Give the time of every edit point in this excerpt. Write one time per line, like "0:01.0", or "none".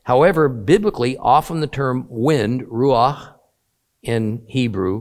none

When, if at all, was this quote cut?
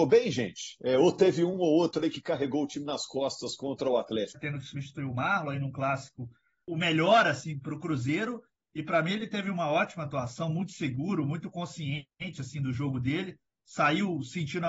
0:04.3
0:06.7

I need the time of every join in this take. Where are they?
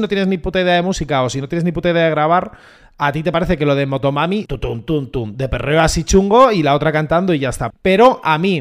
0:04.5
0:07.7

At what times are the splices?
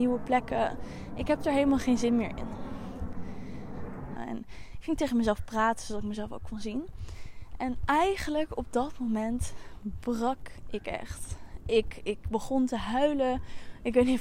0:04.2

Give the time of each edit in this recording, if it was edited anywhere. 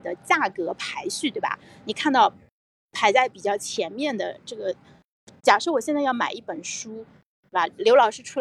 none

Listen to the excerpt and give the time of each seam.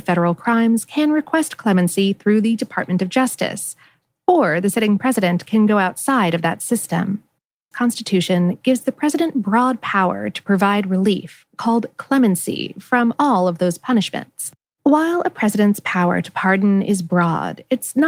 0:07.7
0:14.6

